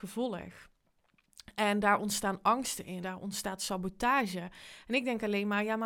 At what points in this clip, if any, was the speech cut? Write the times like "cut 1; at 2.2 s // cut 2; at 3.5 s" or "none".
cut 1; at 3.0 s